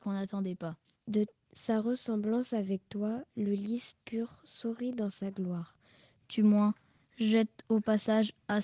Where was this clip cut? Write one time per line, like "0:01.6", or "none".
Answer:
0:01.0
0:06.2